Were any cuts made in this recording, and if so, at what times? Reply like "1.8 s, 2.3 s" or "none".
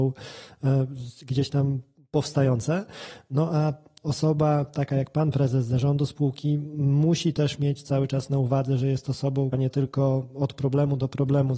9.5 s

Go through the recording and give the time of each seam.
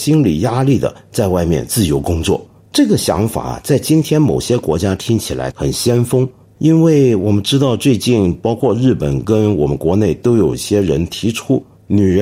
5.5 s

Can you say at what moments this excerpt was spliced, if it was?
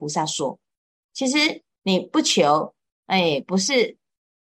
1.0 s

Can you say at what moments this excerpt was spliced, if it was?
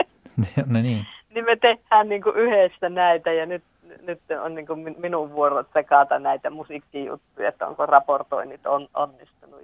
none

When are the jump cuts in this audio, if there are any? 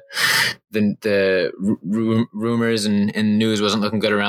none

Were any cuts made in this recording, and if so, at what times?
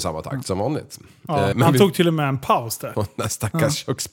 1.5 s, 2.9 s

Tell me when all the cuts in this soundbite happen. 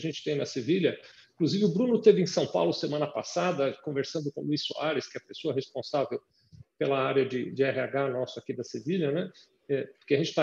none

